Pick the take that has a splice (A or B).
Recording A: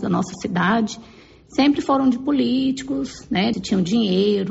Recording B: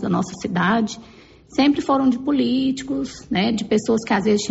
A